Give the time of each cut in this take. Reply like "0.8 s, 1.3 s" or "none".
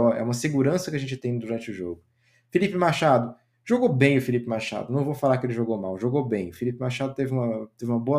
none